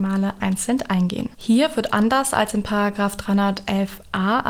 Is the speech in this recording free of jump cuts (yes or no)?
no